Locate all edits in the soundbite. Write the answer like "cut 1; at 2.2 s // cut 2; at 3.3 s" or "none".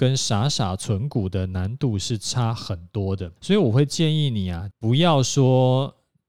cut 1; at 3.4 s // cut 2; at 4.7 s